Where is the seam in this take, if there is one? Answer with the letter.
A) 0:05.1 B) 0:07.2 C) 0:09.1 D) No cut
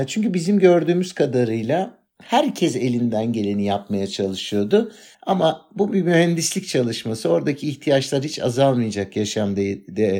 A